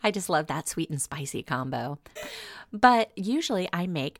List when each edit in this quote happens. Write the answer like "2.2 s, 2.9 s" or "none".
2.2 s